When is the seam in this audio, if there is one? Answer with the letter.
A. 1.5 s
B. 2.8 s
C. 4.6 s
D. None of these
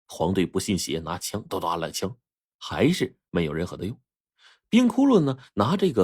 A